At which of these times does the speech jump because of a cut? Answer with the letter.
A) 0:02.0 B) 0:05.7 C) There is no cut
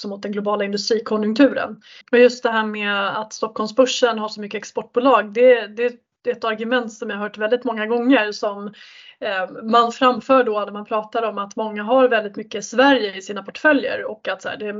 A